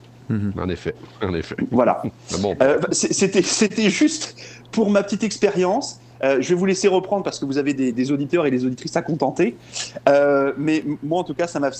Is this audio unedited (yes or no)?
yes